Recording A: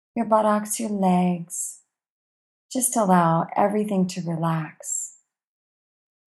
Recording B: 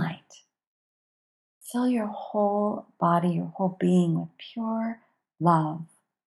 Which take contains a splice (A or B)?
B